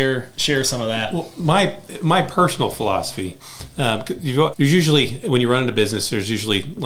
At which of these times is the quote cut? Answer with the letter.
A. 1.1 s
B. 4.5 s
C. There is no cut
B